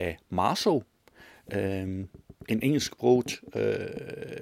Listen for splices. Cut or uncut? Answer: uncut